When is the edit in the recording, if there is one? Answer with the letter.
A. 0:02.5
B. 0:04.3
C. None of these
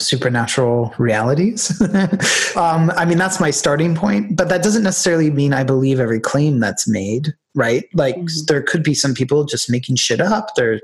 A